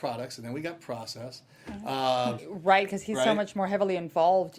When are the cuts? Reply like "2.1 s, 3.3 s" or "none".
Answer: 2.4 s